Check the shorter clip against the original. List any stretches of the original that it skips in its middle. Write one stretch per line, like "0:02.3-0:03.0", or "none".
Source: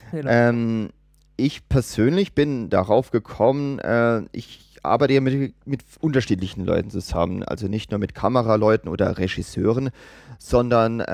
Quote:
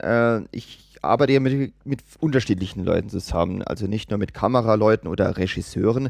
none